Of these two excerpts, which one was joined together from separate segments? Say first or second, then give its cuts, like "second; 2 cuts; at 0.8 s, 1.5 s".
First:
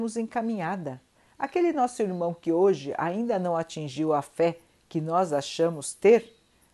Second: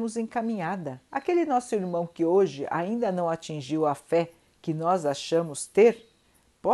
second; 1 cut; at 1.1 s